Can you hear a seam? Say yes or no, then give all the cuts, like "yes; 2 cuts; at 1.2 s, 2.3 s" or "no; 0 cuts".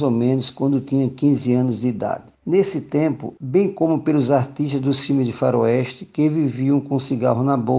yes; 1 cut; at 3.4 s